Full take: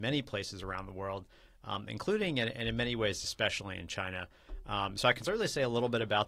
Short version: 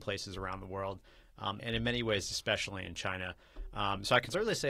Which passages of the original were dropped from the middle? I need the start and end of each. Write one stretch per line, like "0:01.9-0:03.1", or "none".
0:01.9-0:02.5